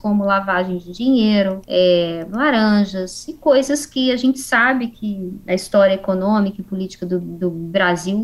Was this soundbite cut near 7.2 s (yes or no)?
no